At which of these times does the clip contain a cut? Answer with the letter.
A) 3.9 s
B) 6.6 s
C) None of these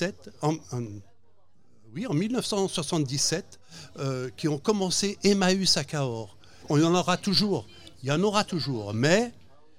B